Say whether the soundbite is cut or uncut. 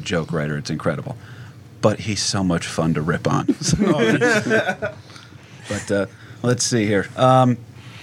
cut